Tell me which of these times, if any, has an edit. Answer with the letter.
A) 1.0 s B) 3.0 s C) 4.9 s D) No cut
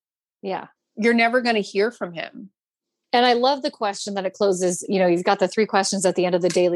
B